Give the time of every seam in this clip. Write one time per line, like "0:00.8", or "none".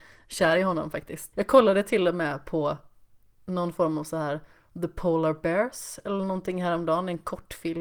0:01.3